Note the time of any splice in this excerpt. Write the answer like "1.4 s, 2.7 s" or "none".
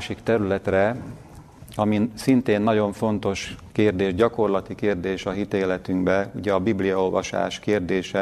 none